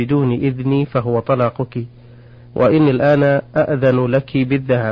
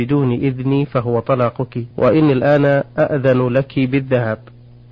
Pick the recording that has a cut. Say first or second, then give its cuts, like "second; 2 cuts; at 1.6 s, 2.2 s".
second; 1 cut; at 1.9 s